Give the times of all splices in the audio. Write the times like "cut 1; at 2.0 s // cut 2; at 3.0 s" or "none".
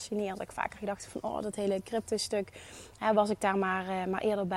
none